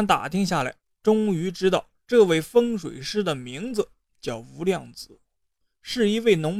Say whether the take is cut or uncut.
uncut